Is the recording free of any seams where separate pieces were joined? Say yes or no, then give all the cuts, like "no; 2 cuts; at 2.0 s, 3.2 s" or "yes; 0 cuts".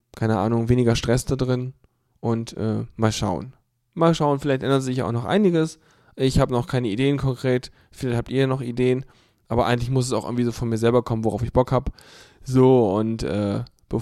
yes; 0 cuts